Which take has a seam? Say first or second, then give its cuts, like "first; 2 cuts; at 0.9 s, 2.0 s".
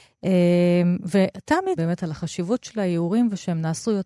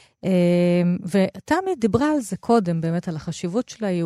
first; 1 cut; at 1.8 s